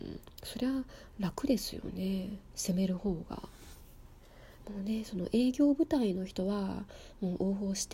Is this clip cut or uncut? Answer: cut